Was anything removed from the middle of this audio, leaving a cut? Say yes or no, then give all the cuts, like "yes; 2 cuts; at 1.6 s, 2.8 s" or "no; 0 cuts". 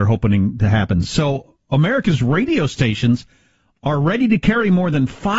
no; 0 cuts